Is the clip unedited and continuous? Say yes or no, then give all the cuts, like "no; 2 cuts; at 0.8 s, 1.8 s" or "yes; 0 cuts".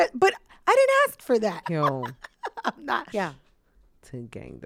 no; 2 cuts; at 1.6 s, 3.1 s